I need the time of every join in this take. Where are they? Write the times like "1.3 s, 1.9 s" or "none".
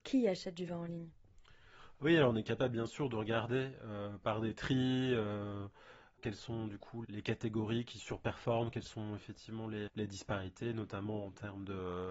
7.0 s, 9.9 s

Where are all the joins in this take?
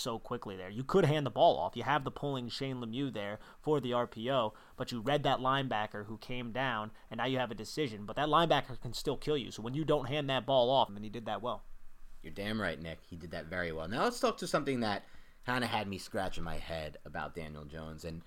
10.9 s

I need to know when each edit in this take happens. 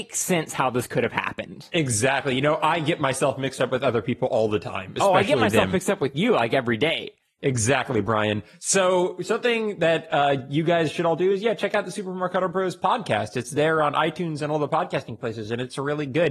none

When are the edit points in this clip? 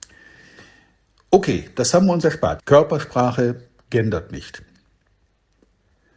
2.6 s

